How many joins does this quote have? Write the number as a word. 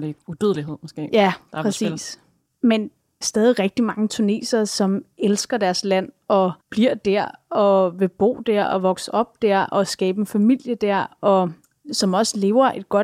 two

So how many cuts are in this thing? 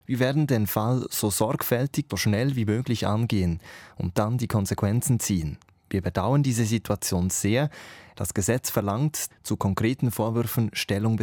three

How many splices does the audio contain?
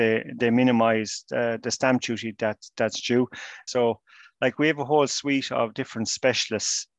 one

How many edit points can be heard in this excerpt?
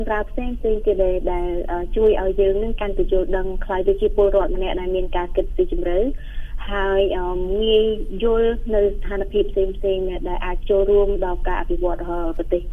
zero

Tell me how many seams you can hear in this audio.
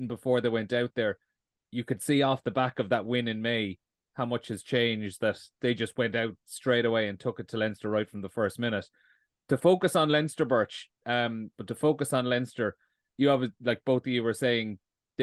one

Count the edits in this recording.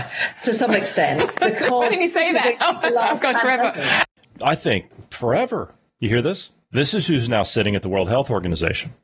zero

